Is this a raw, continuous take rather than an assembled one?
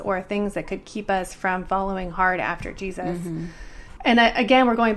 no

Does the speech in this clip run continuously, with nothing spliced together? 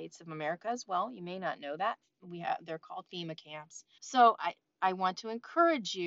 no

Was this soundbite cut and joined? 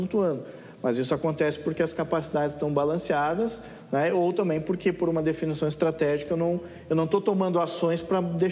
no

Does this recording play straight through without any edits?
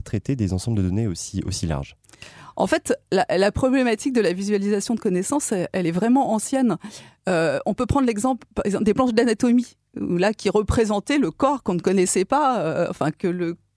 yes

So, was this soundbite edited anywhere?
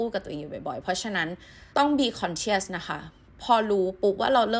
yes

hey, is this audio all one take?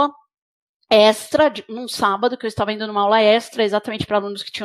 yes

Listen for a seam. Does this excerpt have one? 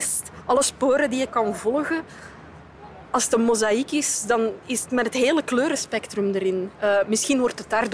yes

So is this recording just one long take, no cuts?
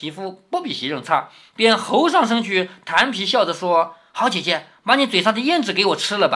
yes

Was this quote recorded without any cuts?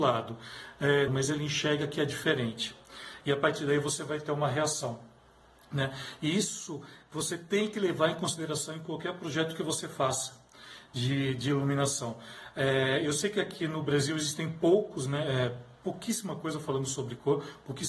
no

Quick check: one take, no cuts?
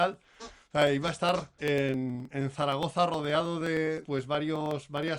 no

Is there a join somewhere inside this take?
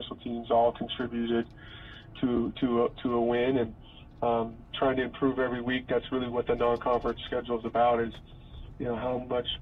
no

